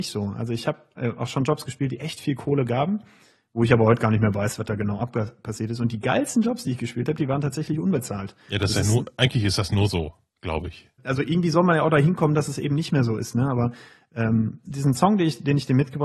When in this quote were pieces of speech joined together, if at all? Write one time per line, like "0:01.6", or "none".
0:11.0
0:14.6